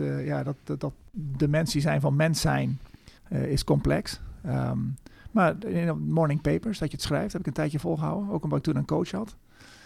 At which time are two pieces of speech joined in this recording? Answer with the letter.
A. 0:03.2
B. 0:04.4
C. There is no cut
A